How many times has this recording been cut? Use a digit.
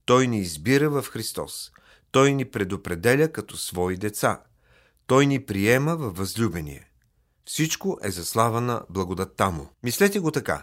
1